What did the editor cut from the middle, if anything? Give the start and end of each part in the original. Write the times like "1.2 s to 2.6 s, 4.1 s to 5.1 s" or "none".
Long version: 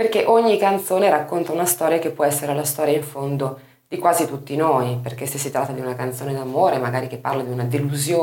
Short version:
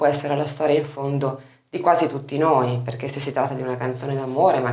none